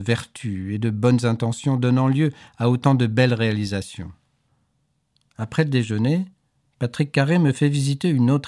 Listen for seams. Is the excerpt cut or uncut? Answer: uncut